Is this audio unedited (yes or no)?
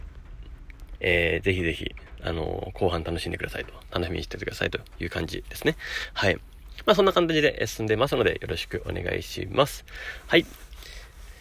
no